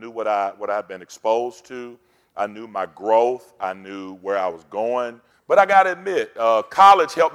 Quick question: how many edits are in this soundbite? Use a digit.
1